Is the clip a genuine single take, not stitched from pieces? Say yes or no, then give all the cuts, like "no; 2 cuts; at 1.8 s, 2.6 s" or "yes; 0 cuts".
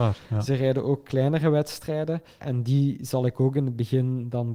no; 1 cut; at 2.4 s